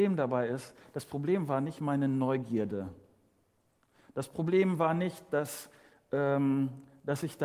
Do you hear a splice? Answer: no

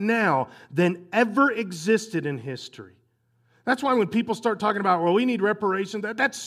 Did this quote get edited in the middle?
no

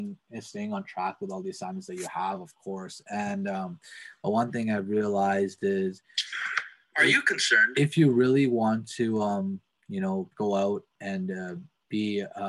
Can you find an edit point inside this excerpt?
no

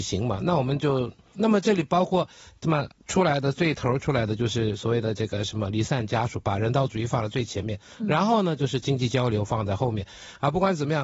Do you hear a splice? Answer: yes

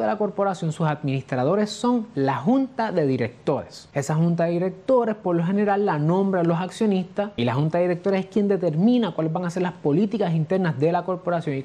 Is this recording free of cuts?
yes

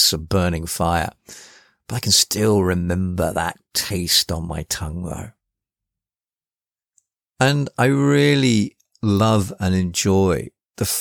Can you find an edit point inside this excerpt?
no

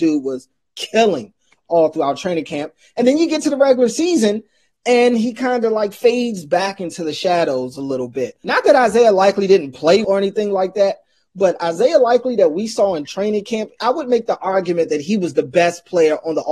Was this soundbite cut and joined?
yes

